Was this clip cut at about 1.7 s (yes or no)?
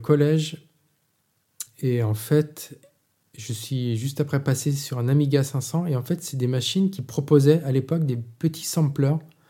no